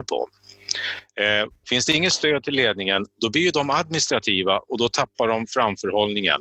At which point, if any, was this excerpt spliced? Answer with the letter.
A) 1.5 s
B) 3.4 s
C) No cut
A